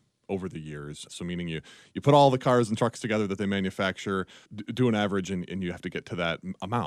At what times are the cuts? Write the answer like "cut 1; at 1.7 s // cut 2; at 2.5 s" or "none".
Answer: cut 1; at 1.1 s // cut 2; at 4.5 s

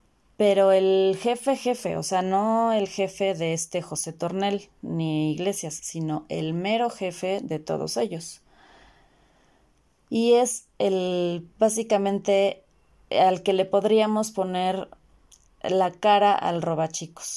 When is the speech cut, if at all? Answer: none

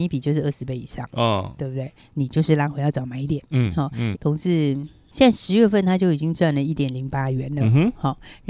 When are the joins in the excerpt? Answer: cut 1; at 2.1 s // cut 2; at 4.1 s

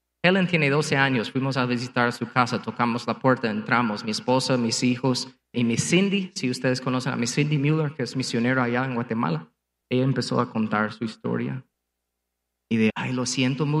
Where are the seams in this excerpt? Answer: cut 1; at 5.5 s // cut 2; at 9.8 s // cut 3; at 12.9 s

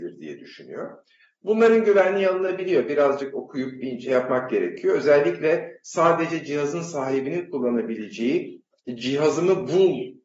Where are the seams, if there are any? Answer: none

